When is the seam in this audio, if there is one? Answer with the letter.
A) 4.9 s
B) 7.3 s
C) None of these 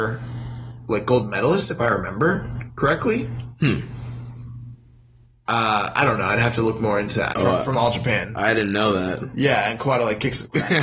B